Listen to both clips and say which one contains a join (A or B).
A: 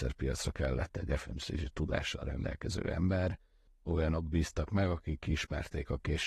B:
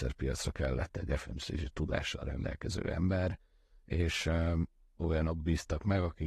A